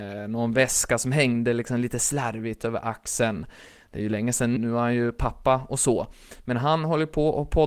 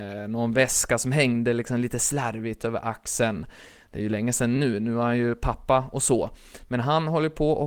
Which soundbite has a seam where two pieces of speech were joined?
first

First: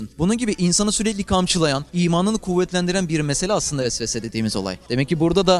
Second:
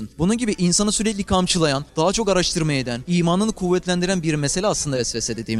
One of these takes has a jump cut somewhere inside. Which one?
first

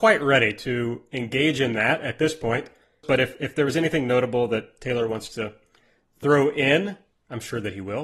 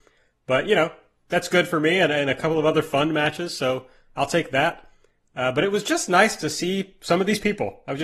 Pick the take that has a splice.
first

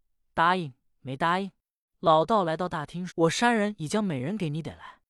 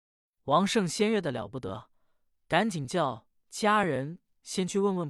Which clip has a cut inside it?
first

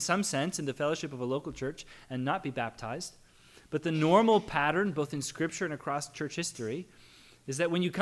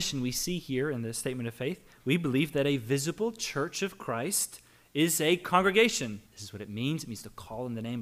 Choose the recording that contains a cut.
second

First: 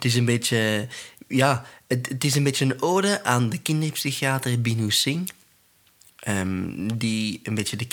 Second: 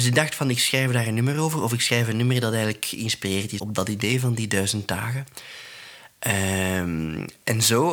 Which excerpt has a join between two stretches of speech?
second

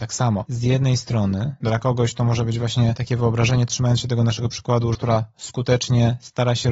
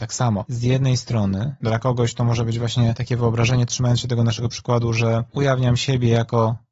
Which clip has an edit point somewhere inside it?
first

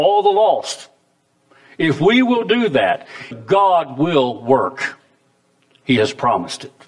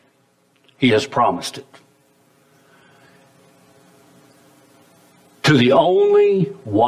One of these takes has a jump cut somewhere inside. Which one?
first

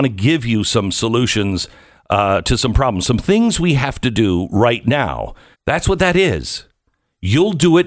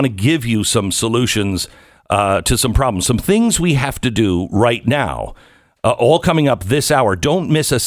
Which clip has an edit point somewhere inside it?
first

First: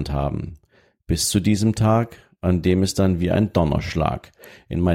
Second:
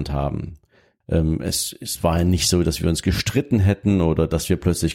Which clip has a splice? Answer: second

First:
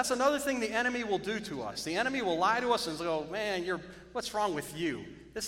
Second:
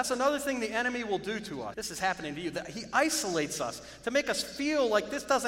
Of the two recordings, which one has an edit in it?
second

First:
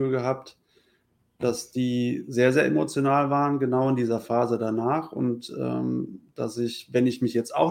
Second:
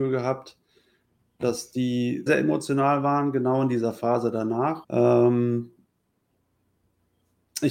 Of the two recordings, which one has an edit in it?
second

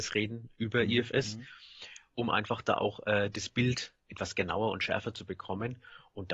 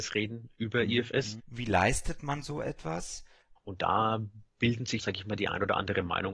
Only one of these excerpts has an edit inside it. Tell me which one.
second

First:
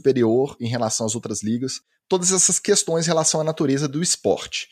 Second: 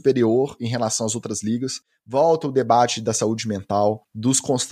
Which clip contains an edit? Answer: first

